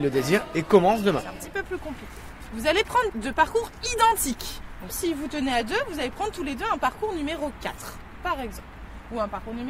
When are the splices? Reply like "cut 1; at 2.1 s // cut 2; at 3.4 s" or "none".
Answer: cut 1; at 3.1 s // cut 2; at 4.9 s